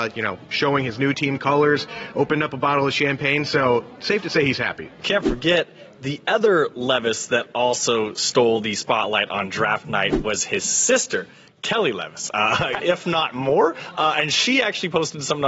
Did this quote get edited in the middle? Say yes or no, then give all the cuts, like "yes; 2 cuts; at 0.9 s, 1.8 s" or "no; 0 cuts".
yes; 1 cut; at 12.8 s